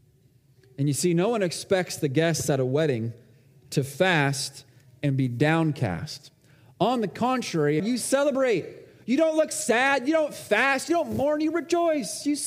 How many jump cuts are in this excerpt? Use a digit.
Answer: 1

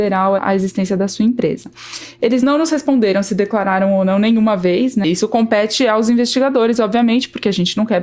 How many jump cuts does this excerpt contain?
1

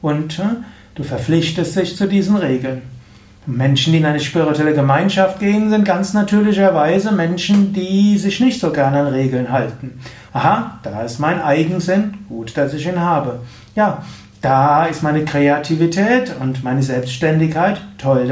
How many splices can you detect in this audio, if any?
1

